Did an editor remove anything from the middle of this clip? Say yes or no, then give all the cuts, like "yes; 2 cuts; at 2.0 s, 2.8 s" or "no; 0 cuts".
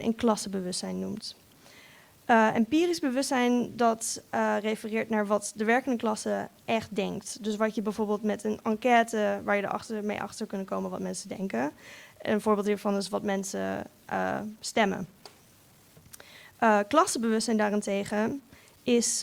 no; 0 cuts